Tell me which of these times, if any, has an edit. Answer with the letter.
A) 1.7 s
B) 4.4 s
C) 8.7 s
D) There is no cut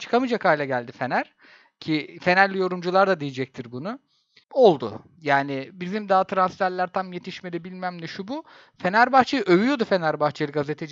B